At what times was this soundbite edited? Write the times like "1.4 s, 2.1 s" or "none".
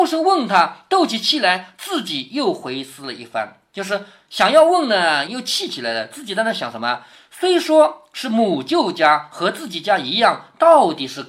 5.3 s